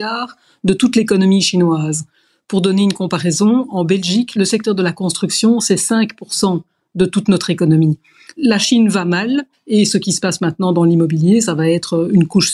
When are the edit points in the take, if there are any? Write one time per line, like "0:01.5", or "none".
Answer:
none

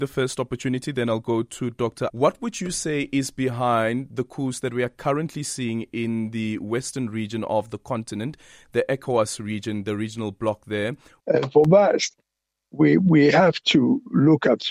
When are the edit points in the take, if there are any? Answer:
0:02.1
0:11.2

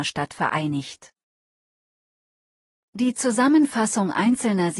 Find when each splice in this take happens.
none

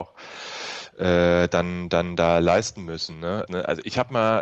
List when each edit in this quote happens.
0:03.5

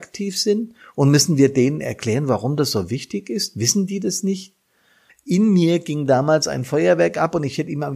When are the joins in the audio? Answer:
0:05.1

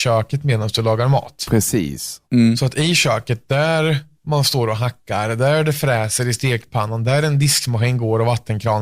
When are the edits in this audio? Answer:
0:02.2

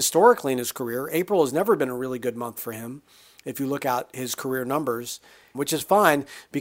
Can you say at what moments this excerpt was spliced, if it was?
0:05.5

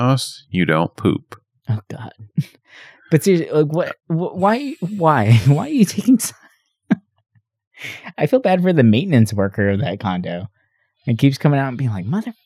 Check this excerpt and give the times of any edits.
none

